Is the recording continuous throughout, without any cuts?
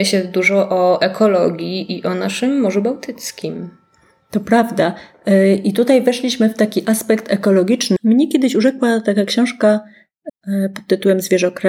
no; 2 cuts; at 8.0 s, 10.3 s

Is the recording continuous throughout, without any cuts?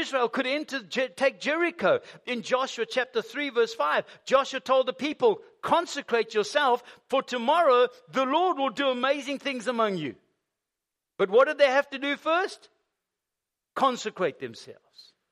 yes; 0 cuts

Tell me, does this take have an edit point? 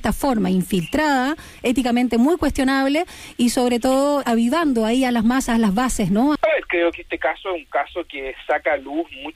yes; 2 cuts; at 4.2 s, 6.4 s

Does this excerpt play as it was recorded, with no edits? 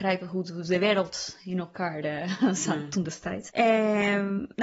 no; 1 cut; at 3.5 s

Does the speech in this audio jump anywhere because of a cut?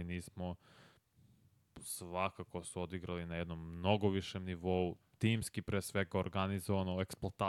no; 0 cuts

